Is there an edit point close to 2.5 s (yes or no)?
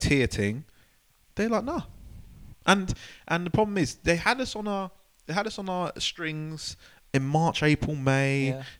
yes